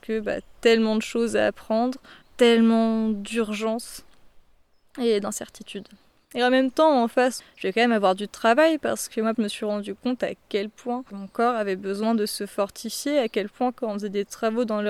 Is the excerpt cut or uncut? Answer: cut